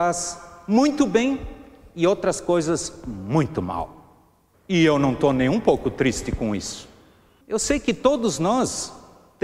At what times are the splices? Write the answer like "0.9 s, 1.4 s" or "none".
4.5 s, 7.4 s